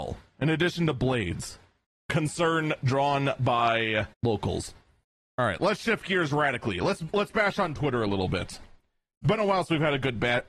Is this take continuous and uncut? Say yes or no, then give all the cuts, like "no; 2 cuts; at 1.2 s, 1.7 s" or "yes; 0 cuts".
no; 2 cuts; at 2.0 s, 4.1 s